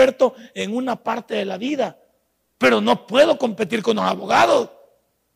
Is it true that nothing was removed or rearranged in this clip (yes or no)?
no